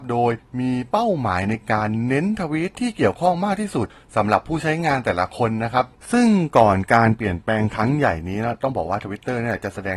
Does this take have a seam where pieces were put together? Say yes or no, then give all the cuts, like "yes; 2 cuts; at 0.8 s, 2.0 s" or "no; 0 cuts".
no; 0 cuts